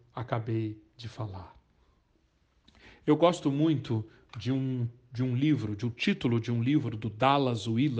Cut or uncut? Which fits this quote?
uncut